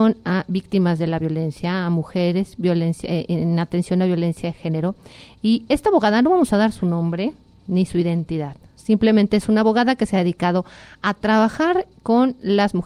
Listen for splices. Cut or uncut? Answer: uncut